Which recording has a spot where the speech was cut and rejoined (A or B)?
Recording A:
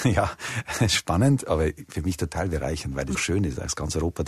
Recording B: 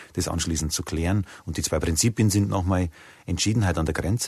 A